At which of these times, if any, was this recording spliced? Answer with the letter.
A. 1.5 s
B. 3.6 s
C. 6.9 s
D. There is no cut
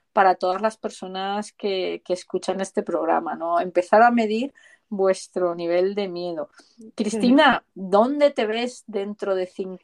D